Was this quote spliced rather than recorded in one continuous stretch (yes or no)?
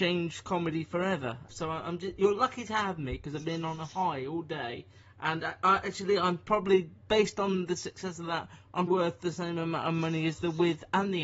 yes